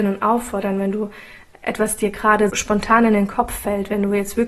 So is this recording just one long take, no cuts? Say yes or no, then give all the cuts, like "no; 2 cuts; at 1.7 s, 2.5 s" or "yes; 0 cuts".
no; 1 cut; at 2.5 s